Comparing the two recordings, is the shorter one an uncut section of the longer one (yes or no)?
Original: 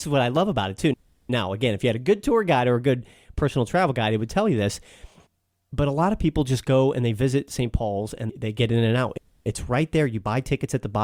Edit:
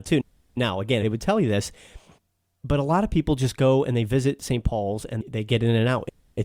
no